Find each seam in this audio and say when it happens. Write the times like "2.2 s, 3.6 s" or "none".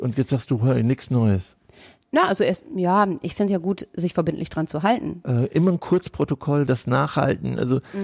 5.2 s, 6.7 s